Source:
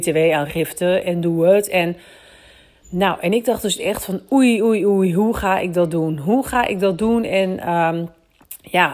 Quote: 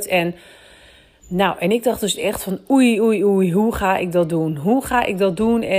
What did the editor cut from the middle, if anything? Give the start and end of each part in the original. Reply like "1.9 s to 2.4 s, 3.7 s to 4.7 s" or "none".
none

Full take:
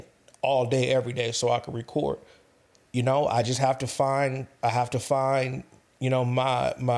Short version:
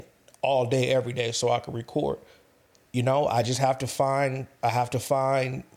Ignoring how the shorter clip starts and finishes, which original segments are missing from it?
none

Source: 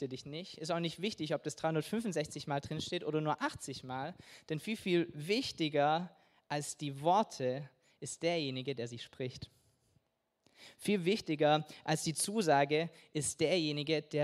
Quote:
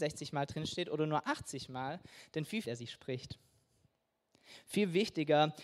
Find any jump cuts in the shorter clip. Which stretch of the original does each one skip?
4.8 s to 8.8 s

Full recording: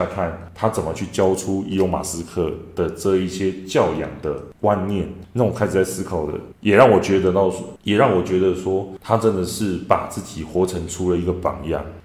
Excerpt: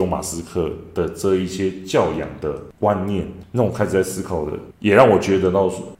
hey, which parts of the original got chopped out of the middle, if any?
none

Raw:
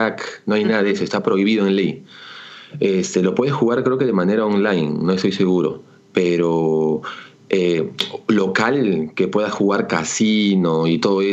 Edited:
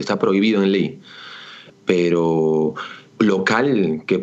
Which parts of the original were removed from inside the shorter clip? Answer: 2.7 s to 6.0 s, 7.4 s to 8.3 s

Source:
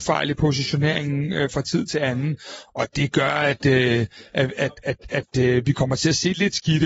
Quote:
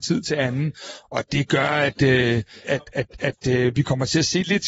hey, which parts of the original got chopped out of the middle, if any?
4.3 s to 4.5 s

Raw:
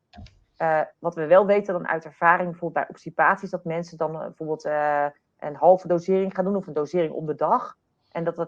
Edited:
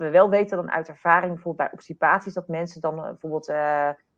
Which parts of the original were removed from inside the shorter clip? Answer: none

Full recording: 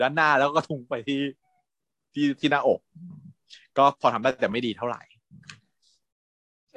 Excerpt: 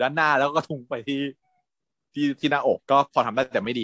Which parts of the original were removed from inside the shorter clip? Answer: 2.8 s to 3.7 s

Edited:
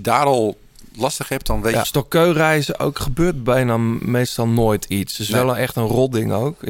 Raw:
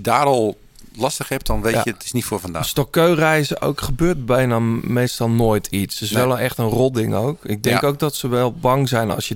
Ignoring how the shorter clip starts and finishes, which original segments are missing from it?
1.8 s to 2.7 s

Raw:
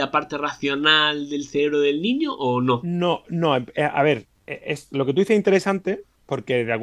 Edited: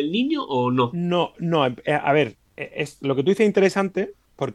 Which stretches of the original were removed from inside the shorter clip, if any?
none

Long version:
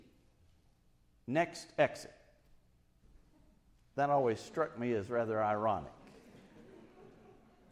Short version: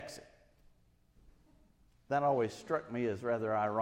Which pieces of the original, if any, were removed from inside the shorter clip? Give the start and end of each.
none

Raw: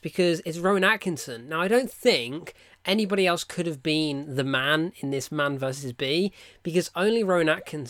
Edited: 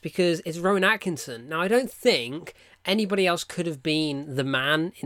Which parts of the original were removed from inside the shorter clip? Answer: none

